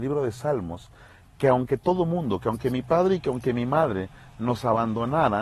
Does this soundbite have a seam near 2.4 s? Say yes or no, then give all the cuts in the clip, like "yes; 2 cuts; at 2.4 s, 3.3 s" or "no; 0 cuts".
no; 0 cuts